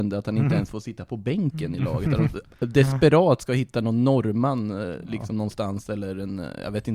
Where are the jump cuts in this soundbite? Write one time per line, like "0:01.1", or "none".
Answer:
none